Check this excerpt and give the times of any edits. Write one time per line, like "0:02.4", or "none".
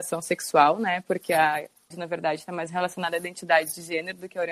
0:01.9